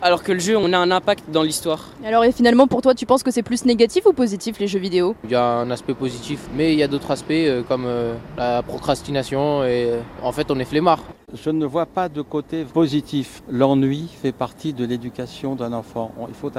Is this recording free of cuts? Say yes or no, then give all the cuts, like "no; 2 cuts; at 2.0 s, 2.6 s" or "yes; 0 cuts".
yes; 0 cuts